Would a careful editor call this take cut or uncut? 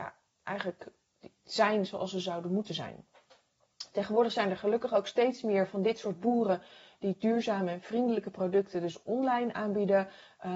uncut